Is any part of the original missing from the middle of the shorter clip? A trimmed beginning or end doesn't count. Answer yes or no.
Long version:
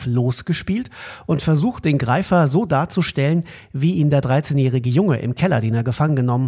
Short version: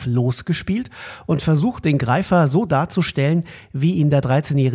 no